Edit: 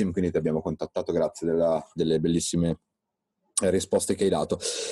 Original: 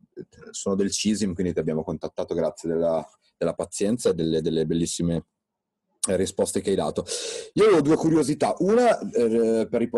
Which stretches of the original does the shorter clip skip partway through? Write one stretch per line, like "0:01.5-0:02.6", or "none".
0:03.2-0:04.4